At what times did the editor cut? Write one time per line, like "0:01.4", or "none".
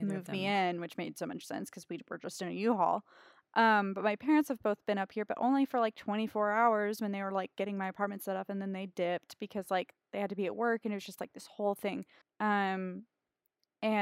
0:12.2